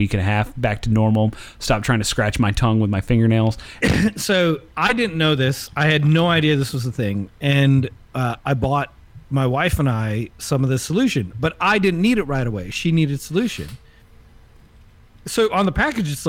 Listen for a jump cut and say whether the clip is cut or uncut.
cut